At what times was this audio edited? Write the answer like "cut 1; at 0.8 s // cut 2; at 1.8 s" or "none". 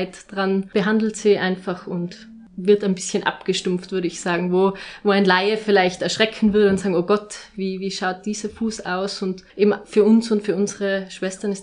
none